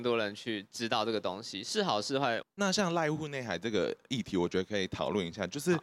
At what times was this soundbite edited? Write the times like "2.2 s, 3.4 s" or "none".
2.4 s